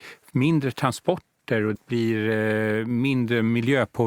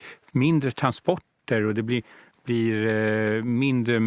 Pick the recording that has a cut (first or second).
first